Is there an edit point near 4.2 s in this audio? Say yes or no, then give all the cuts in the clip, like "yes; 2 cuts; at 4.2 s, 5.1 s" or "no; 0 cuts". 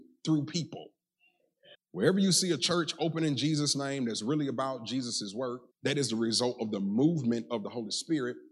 no; 2 cuts; at 1.7 s, 5.7 s